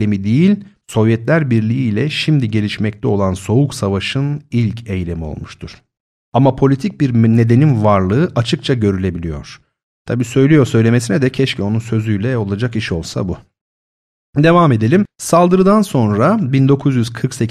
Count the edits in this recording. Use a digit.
2